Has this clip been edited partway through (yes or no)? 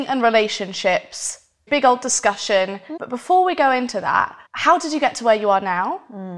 yes